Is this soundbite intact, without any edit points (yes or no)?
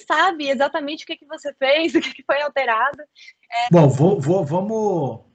no